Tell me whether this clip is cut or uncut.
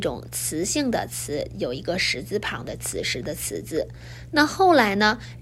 uncut